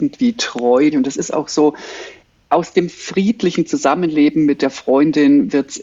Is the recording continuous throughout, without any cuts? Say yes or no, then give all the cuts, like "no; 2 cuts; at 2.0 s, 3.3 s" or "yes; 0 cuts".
no; 1 cut; at 0.9 s